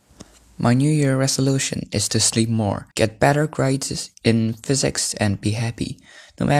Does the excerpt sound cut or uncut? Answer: cut